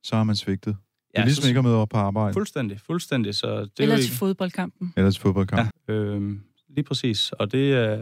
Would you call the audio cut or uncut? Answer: cut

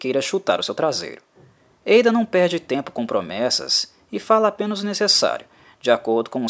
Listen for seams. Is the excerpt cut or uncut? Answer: uncut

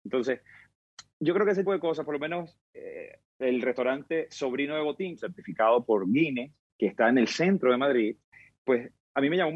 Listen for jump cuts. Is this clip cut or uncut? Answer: cut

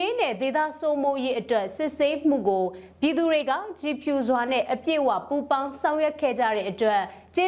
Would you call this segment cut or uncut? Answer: uncut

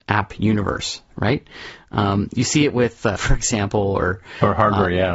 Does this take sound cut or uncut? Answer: cut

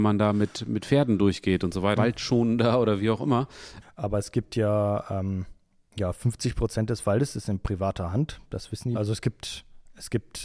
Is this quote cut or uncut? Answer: cut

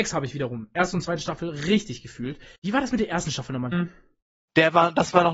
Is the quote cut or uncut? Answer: cut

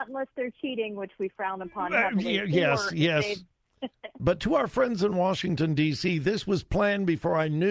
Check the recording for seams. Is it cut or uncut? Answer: cut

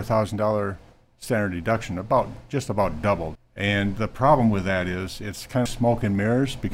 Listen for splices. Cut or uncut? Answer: cut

